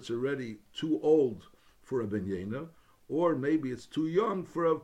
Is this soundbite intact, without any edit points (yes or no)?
yes